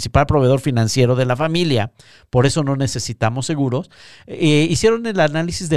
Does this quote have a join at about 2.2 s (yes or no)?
no